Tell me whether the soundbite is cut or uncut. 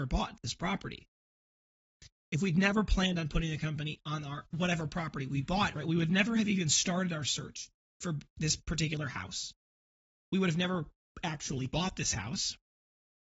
cut